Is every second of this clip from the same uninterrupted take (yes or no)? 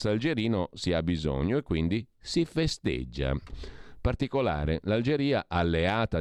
no